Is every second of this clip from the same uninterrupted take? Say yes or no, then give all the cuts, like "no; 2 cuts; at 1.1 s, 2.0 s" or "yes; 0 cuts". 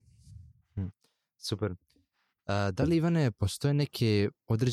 yes; 0 cuts